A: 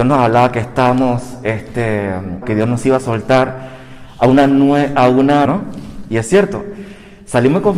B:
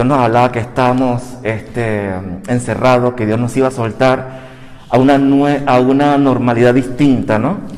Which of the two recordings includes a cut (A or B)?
A